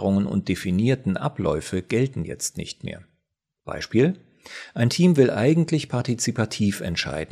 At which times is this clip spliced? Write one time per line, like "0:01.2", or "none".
none